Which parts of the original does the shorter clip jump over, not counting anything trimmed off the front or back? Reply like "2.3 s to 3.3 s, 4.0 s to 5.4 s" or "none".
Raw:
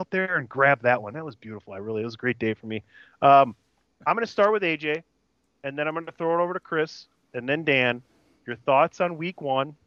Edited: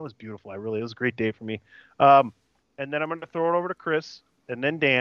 3.8 s to 5.5 s

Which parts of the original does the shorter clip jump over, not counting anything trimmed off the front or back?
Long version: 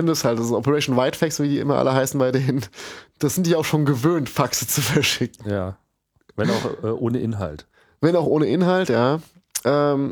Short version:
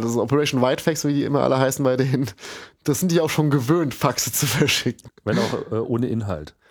5.4 s to 6.2 s

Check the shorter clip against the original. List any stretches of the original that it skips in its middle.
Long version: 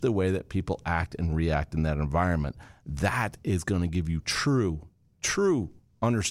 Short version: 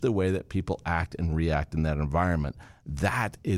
none

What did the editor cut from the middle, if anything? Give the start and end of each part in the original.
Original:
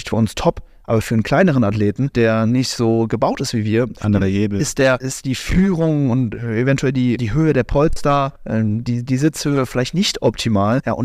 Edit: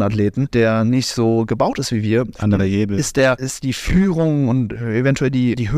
none

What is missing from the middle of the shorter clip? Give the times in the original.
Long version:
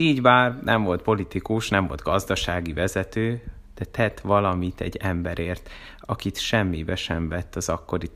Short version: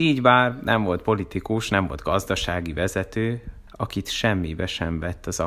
3.7 s to 6.0 s

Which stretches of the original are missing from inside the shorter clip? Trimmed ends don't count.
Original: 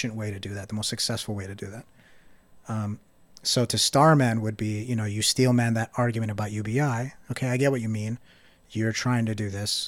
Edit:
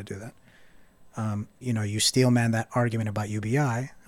3.1 s to 4.8 s

